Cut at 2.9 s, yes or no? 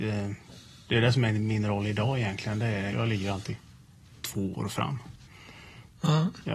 yes